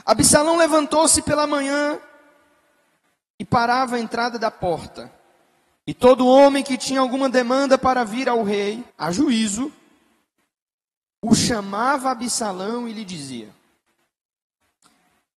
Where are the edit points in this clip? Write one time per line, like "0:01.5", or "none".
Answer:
0:08.9